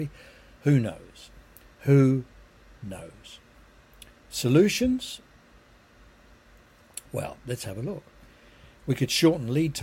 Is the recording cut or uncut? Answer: uncut